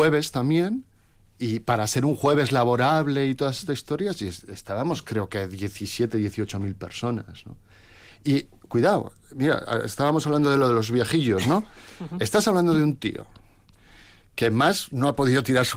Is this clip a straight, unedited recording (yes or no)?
yes